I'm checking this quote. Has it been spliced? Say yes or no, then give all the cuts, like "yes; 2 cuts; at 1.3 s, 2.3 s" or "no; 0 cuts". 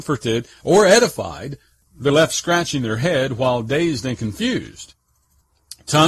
yes; 1 cut; at 2.1 s